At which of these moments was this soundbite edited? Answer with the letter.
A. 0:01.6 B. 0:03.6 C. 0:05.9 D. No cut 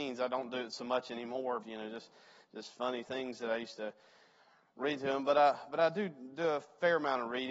A